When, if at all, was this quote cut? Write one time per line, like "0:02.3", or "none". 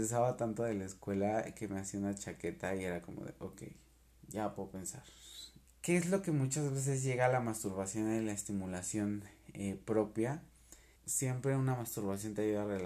0:05.6
0:11.0